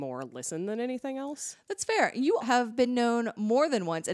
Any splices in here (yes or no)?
yes